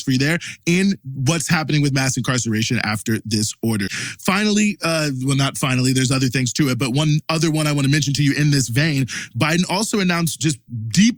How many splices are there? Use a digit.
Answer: 1